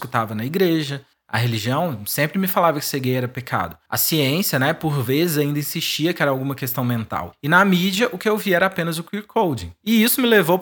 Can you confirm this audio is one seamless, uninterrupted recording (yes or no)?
yes